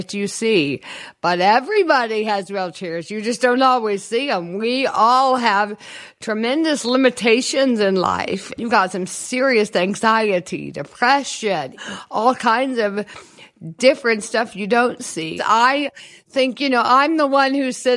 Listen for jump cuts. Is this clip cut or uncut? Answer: cut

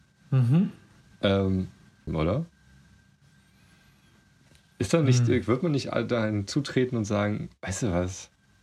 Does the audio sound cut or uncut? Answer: cut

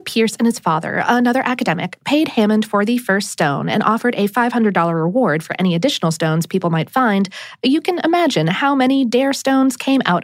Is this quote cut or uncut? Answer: uncut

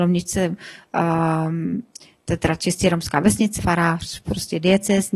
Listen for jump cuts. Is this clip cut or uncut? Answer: cut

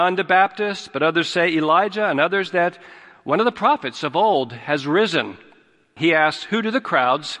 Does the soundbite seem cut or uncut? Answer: cut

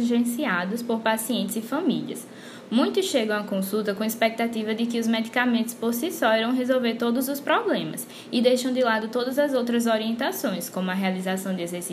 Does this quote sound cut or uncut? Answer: uncut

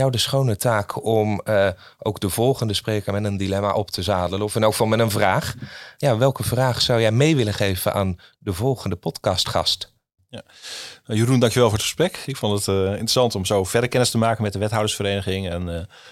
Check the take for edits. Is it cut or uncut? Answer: uncut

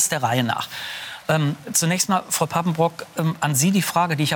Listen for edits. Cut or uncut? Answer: uncut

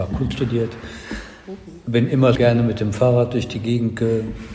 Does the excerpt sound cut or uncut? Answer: cut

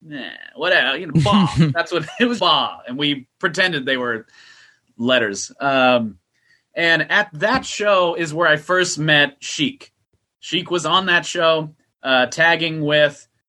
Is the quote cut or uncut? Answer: cut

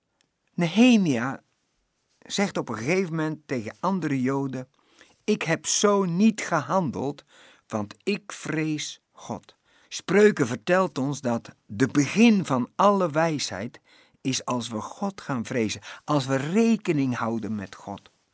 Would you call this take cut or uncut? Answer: cut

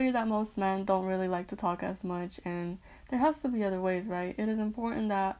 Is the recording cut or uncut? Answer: uncut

